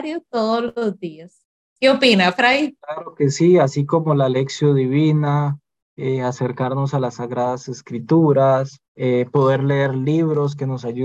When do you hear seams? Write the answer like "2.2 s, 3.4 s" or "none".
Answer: 2.8 s, 8.8 s